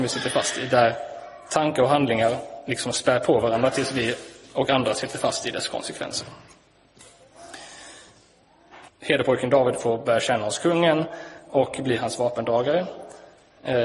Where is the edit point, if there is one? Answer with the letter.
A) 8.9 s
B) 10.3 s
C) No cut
A